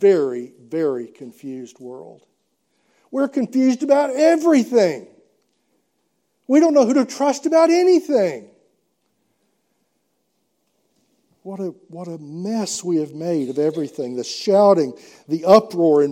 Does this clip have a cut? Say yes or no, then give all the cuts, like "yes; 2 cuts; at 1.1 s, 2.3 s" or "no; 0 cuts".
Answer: no; 0 cuts